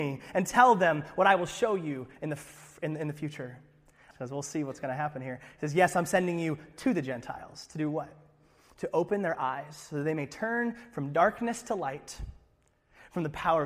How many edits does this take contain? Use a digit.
1